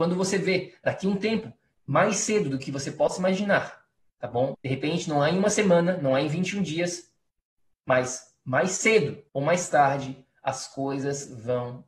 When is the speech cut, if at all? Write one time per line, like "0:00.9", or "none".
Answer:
0:04.5
0:09.3